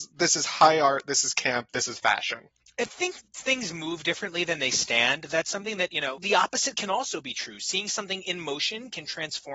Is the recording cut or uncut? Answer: uncut